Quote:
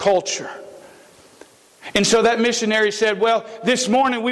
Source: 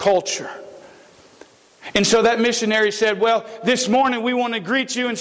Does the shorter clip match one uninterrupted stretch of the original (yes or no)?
yes